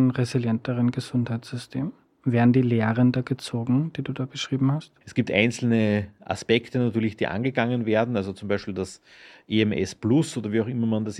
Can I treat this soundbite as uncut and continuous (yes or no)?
no